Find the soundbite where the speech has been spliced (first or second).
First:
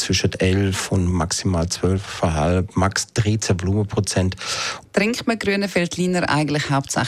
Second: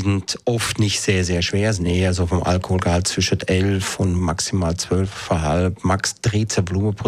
first